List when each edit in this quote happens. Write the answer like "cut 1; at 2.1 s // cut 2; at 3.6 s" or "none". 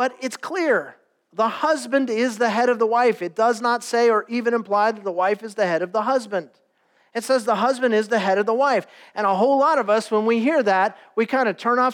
none